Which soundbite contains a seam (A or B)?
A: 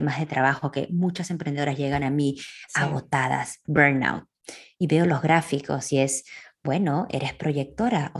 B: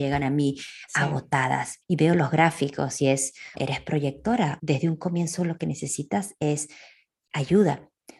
B